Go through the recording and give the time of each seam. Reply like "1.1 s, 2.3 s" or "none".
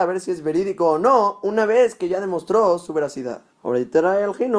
3.5 s